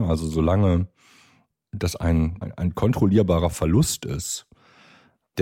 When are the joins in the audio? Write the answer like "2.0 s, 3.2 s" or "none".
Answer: 2.4 s

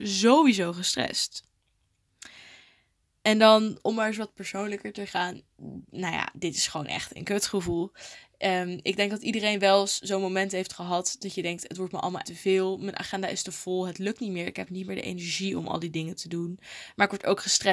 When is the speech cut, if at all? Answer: 12.2 s

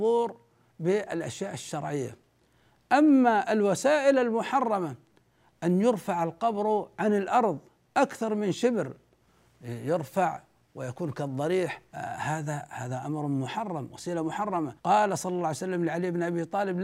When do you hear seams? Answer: 11.9 s, 14.8 s

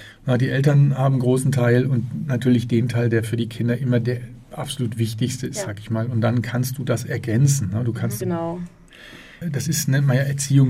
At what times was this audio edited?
8.2 s

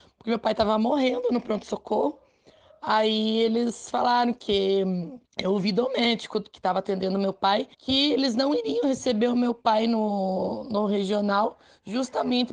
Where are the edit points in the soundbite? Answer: 5.3 s, 7.7 s

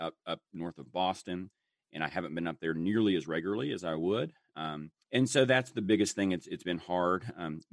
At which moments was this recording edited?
5.0 s

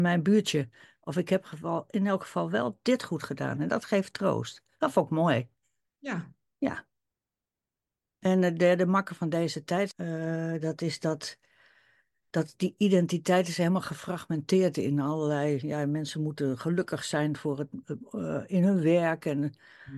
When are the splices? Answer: 9.9 s

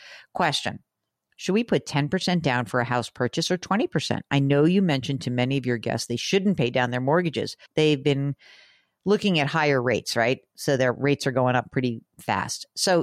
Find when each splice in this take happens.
7.7 s

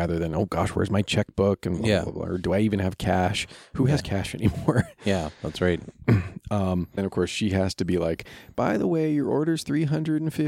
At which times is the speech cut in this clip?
7.0 s

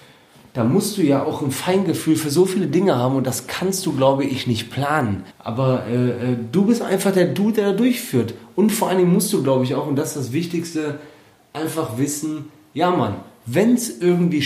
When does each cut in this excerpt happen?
5.3 s

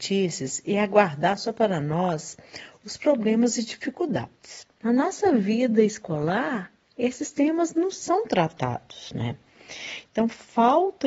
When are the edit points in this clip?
4.8 s

